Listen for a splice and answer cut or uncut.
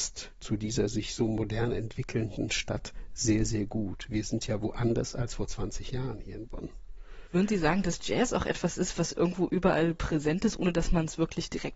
uncut